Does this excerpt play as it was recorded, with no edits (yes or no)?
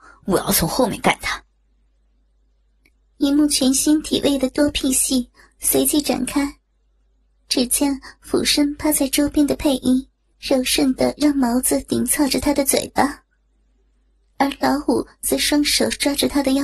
no